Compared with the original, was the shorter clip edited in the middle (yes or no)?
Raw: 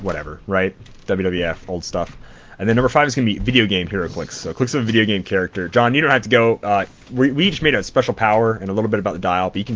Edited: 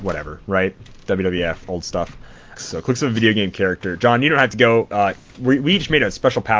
yes